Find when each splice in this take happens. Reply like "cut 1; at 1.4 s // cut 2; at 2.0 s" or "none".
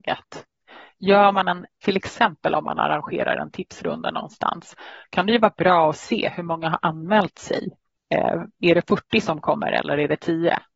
cut 1; at 1.7 s